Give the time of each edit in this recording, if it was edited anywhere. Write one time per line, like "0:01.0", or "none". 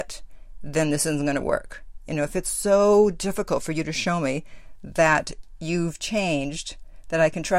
none